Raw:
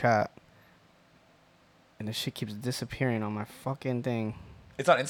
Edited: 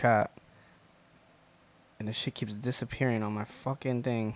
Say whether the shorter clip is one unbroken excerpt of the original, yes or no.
yes